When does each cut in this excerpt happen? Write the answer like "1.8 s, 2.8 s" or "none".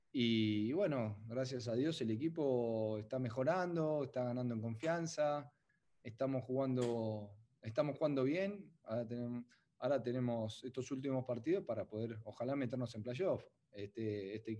none